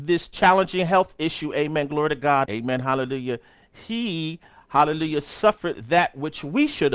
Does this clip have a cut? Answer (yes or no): yes